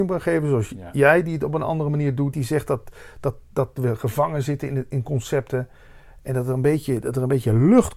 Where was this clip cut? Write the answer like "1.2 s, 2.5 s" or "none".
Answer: 2.3 s